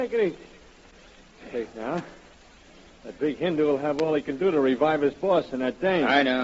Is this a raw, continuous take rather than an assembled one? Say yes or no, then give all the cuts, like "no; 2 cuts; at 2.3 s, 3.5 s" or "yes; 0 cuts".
yes; 0 cuts